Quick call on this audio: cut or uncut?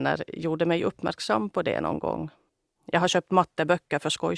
cut